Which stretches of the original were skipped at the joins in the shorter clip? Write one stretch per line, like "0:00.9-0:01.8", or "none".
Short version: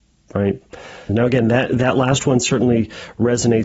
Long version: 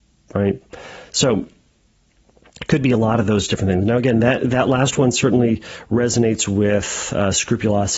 0:01.1-0:03.8